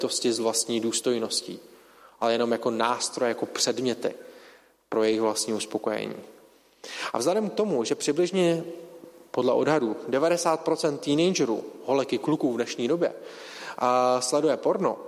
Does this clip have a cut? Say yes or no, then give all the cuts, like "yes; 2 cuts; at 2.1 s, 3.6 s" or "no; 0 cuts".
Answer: no; 0 cuts